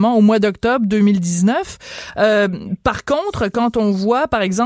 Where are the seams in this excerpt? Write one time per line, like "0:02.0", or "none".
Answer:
none